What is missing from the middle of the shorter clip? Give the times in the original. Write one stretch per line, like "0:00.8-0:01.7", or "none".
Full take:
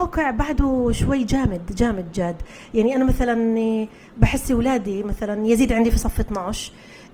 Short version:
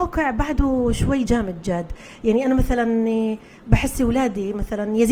0:01.3-0:01.8